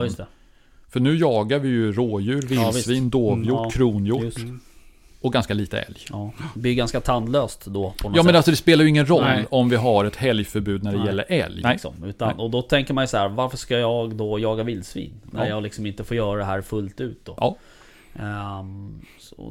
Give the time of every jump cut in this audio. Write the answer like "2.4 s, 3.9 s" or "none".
11.6 s